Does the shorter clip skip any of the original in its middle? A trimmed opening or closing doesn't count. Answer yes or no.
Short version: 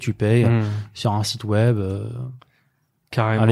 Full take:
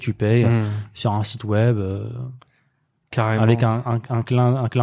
no